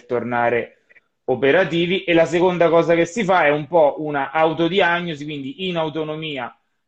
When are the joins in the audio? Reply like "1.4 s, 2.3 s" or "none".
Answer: none